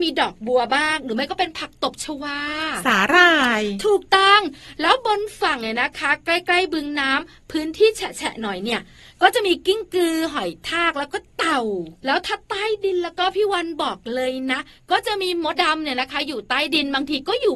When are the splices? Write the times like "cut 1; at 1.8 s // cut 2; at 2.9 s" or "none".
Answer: cut 1; at 15.6 s